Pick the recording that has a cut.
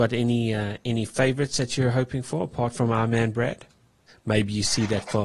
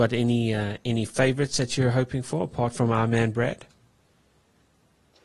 first; 1 cut; at 4.1 s

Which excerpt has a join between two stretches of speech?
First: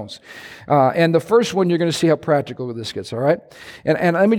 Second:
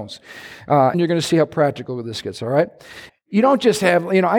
second; 2 cuts; at 0.9 s, 3.1 s

